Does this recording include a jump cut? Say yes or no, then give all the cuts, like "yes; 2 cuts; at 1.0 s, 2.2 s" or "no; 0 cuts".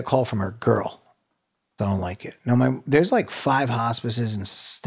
yes; 1 cut; at 1.8 s